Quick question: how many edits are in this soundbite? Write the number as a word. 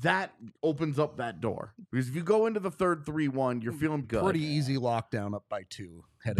two